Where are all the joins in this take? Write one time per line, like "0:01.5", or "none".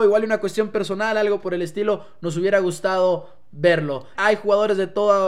0:04.1